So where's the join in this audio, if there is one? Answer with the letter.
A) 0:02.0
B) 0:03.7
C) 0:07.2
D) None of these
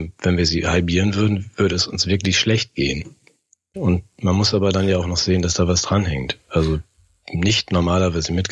B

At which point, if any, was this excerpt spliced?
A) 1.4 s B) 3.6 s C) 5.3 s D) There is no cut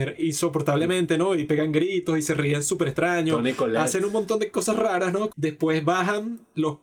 C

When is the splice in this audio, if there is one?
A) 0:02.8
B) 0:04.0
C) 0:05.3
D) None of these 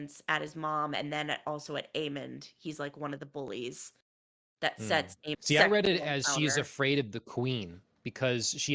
C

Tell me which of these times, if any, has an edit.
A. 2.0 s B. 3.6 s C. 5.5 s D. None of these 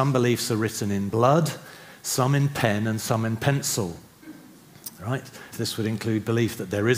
C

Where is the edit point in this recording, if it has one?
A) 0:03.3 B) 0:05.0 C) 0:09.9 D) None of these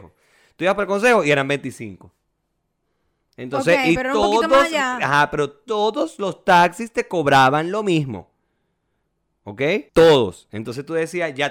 C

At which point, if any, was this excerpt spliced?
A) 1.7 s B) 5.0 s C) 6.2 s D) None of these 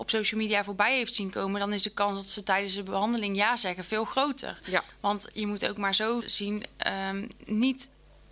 C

